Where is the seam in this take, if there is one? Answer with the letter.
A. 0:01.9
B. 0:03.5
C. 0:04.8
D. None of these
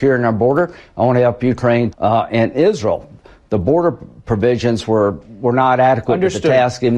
A